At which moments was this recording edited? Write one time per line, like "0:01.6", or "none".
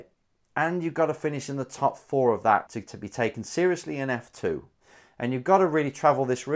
0:02.7